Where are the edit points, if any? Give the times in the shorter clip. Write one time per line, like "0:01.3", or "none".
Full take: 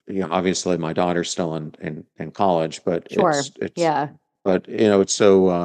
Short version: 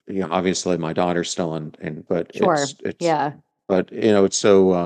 0:02.1